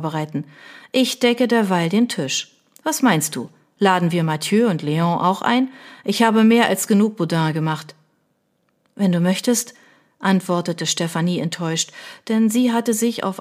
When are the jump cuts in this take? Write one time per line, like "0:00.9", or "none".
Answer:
none